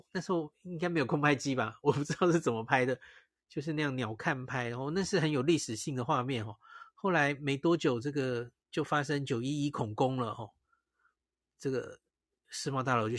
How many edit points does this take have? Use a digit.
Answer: 0